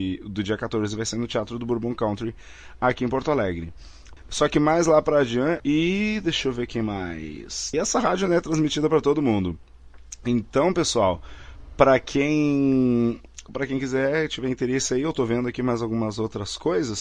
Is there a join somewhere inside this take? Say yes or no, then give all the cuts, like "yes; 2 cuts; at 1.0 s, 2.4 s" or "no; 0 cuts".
yes; 3 cuts; at 4.2 s, 5.6 s, 7.7 s